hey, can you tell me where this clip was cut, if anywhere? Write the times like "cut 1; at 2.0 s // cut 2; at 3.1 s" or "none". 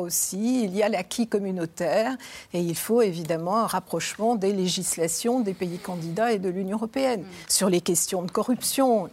none